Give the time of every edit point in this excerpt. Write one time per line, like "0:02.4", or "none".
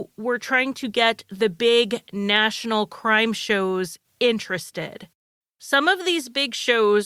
0:05.4